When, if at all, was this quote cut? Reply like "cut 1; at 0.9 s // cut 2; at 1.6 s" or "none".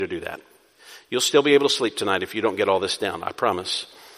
none

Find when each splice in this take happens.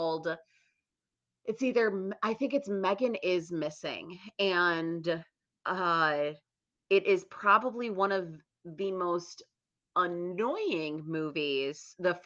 none

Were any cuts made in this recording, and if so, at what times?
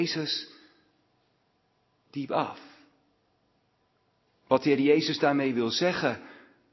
cut 1; at 4.3 s

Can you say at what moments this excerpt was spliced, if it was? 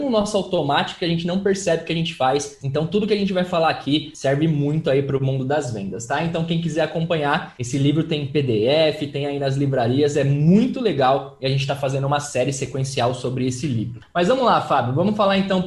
cut 1; at 2.6 s

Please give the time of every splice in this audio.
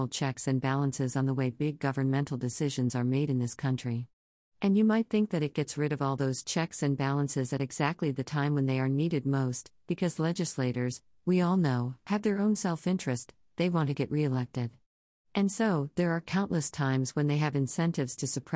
none

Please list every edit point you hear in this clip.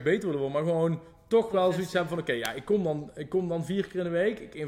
none

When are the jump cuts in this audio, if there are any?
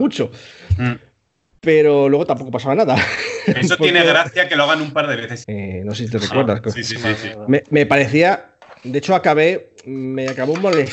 cut 1; at 5.4 s

